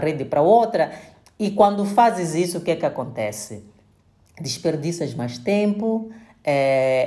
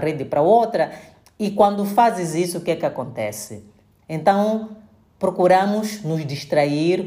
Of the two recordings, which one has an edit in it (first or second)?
second